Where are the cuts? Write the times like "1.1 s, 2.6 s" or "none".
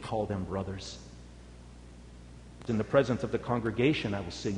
2.7 s